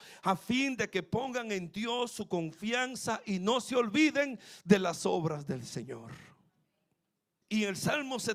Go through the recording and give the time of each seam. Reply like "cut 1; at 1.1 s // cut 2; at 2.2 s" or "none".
cut 1; at 7.4 s

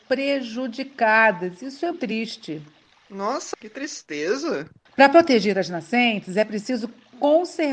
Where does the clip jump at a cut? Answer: cut 1; at 1.9 s // cut 2; at 3.5 s // cut 3; at 4.9 s

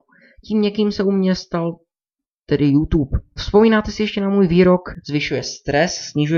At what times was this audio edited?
cut 1; at 3.4 s

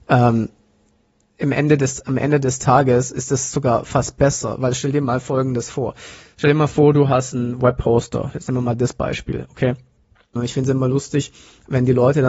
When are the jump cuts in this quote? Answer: cut 1; at 10.4 s

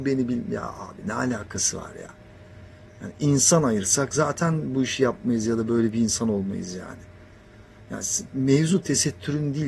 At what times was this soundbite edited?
none

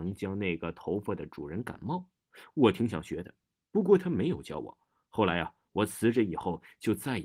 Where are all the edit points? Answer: none

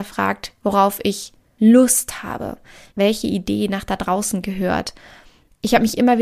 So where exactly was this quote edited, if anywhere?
cut 1; at 2.9 s

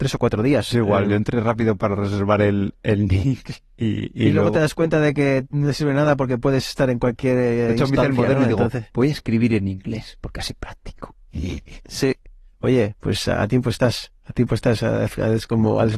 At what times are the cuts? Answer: none

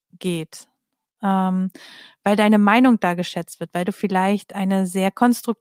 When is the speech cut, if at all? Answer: none

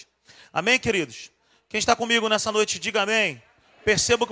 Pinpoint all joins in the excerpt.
none

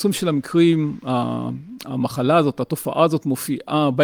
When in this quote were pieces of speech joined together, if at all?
none

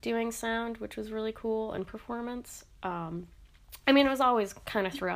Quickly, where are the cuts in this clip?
none

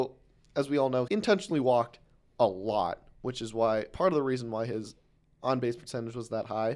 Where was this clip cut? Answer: cut 1; at 1.1 s

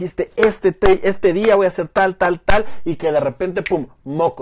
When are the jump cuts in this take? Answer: none

